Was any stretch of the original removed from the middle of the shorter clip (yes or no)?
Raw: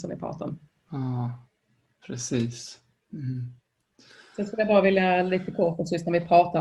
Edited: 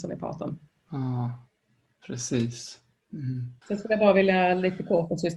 yes